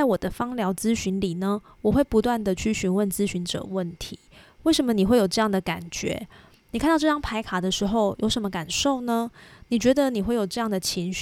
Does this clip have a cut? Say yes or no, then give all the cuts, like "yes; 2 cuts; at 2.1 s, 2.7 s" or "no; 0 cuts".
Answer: no; 0 cuts